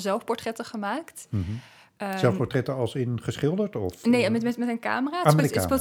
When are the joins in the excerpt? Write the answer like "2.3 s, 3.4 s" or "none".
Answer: none